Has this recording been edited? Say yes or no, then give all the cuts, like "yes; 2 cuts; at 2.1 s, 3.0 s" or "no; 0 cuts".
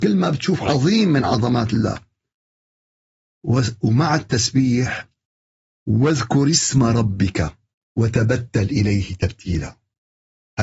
no; 0 cuts